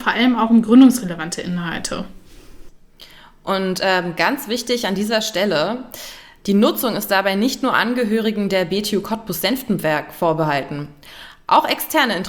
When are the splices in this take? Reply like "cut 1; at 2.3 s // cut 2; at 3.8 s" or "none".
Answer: none